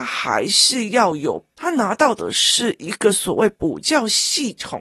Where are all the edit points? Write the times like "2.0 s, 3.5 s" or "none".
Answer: 1.5 s